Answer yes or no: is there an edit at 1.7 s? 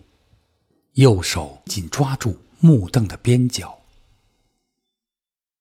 yes